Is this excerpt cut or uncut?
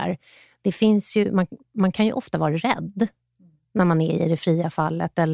uncut